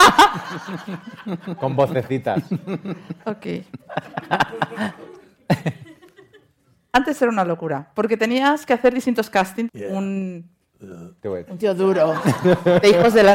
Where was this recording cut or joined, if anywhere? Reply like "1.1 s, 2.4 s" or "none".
9.7 s